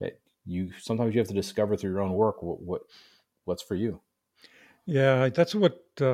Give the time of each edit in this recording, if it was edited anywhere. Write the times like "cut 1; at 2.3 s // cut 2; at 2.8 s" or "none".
none